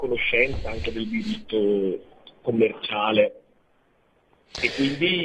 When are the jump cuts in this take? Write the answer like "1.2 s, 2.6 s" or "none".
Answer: none